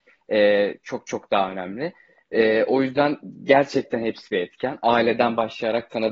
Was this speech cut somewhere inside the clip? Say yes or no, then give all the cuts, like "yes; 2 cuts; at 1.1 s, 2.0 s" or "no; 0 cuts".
no; 0 cuts